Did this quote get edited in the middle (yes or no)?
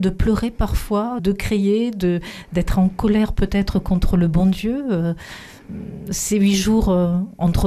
yes